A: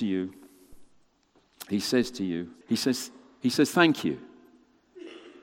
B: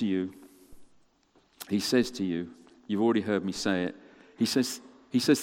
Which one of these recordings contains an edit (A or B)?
A